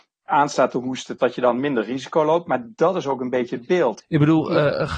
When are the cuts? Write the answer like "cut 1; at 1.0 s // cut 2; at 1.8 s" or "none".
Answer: cut 1; at 1.2 s // cut 2; at 4.0 s